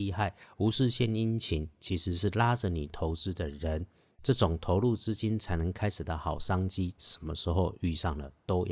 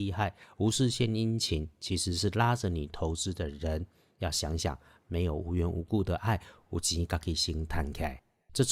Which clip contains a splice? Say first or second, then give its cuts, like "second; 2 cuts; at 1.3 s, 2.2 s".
first; 2 cuts; at 4.1 s, 7.0 s